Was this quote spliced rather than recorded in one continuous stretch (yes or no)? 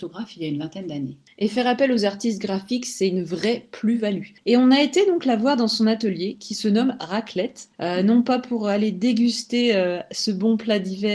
yes